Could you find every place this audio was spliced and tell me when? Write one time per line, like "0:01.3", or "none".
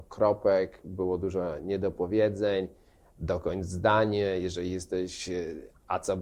none